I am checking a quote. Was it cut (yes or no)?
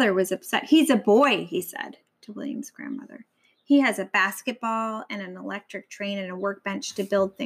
no